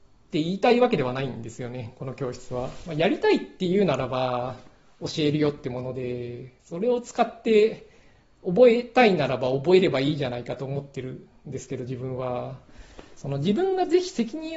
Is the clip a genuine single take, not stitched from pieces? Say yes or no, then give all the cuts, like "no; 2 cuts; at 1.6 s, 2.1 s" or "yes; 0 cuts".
no; 1 cut; at 2.9 s